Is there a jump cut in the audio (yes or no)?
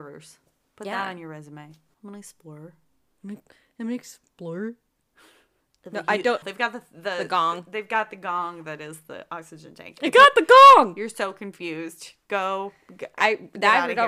yes